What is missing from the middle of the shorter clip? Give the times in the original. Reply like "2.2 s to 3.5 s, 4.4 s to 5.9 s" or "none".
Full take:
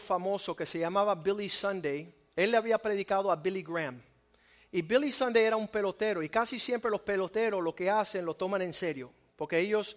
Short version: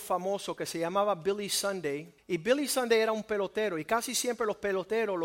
2.2 s to 4.6 s